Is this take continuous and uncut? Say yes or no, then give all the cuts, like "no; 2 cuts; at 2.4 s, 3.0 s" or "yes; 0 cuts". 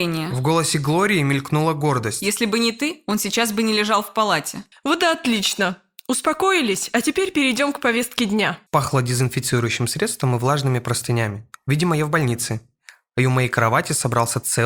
no; 2 cuts; at 4.7 s, 8.7 s